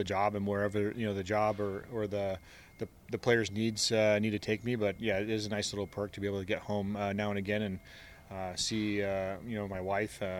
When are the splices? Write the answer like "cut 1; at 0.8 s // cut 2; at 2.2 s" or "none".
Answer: none